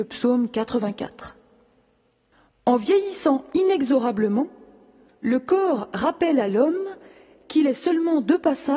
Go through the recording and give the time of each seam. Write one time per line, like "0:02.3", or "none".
none